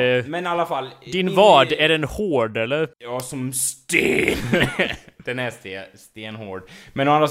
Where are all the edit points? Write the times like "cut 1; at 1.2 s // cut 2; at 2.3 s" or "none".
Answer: cut 1; at 2.9 s